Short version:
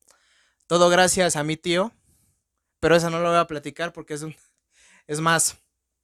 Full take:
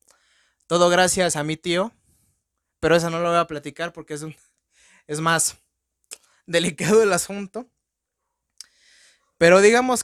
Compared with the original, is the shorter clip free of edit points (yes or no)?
yes